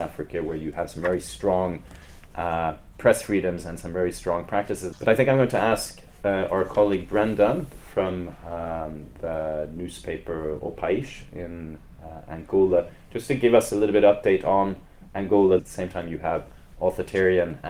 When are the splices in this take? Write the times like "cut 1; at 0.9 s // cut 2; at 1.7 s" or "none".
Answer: cut 1; at 4.9 s // cut 2; at 15.6 s